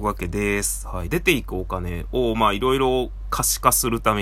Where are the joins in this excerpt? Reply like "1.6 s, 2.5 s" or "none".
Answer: 1.1 s